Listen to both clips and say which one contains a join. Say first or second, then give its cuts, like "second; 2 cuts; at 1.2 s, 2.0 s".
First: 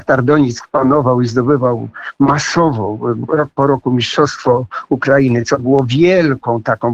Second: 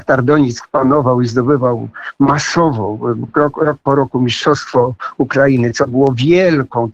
first; 1 cut; at 3.3 s